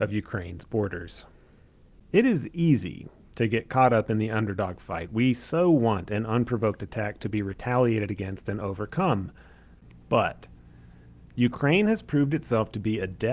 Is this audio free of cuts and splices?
yes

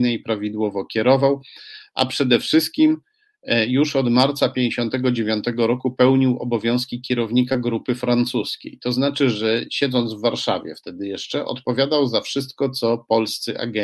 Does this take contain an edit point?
no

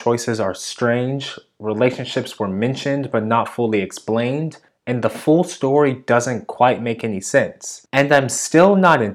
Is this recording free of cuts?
no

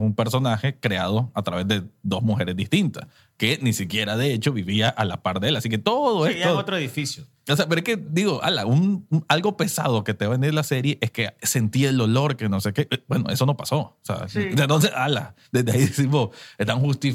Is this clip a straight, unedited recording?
yes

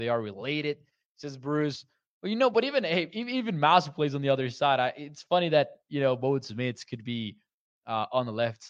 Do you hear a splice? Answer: no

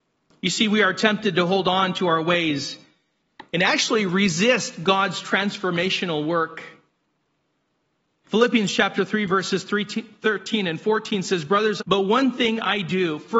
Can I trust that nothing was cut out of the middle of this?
no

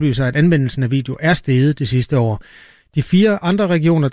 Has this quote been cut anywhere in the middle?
no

